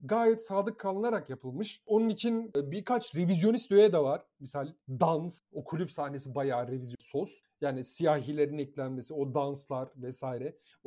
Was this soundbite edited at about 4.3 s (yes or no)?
no